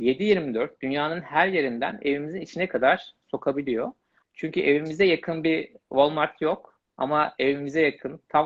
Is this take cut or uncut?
cut